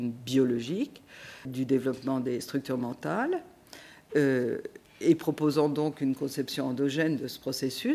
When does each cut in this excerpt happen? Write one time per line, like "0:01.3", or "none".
0:01.5